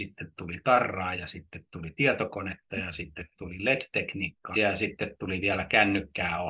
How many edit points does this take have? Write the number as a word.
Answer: three